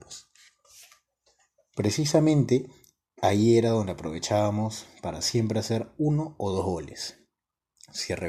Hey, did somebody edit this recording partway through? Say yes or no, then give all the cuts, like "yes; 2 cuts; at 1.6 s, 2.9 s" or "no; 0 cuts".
no; 0 cuts